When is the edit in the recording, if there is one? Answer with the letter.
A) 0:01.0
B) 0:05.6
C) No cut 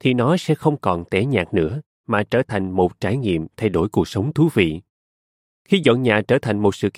C